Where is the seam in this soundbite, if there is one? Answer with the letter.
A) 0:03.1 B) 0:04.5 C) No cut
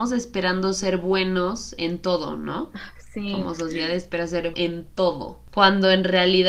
B